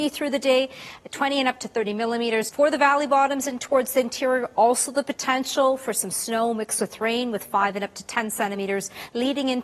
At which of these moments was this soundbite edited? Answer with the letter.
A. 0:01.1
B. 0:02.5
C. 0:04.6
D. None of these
B